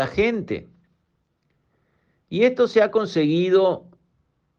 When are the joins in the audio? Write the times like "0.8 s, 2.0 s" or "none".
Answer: none